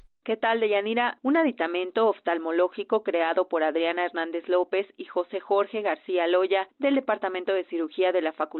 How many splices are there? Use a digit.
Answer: 1